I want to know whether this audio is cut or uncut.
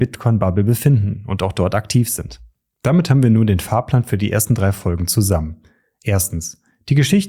uncut